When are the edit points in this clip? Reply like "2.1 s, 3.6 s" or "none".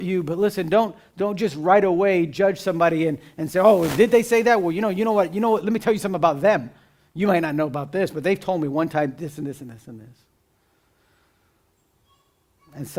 none